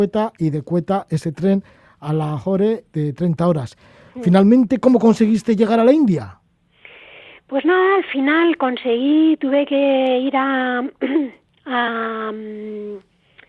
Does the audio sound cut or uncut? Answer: uncut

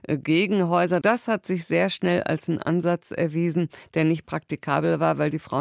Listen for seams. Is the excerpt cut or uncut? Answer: cut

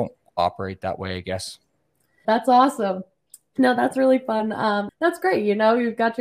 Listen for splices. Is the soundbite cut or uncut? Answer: cut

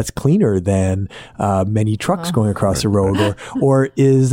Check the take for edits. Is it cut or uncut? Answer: uncut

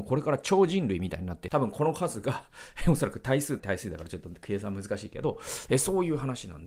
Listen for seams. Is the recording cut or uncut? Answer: cut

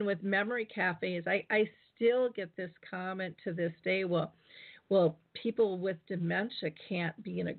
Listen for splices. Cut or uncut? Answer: uncut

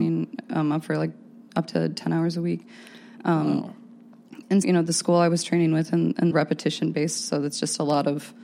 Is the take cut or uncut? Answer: cut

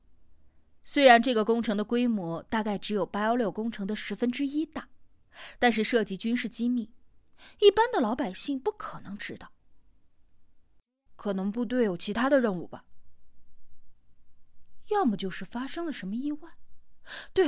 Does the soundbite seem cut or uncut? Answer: cut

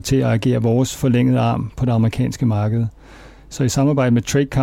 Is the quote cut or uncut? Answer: uncut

